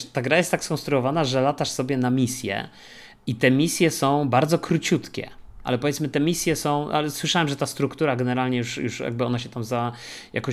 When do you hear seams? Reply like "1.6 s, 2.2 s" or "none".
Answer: 5.6 s